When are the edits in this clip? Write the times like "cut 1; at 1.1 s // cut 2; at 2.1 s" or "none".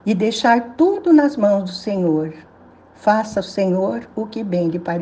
none